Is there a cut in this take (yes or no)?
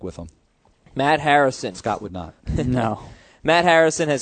no